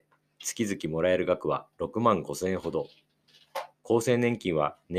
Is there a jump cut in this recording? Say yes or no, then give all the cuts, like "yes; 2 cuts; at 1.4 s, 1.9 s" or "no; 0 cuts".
yes; 1 cut; at 3.7 s